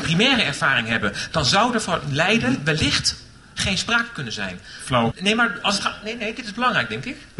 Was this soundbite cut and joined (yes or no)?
yes